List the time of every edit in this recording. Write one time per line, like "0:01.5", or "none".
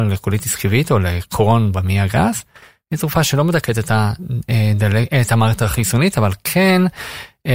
none